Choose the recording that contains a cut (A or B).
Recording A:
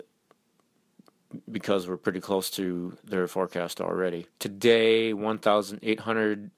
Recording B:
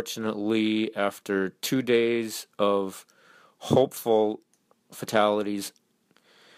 A